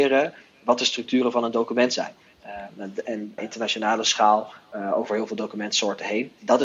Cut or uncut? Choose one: cut